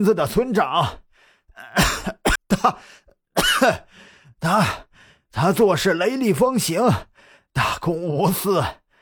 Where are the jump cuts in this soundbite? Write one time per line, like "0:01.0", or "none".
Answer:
0:02.4